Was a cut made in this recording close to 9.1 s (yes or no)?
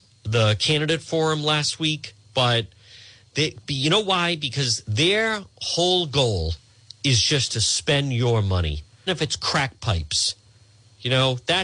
yes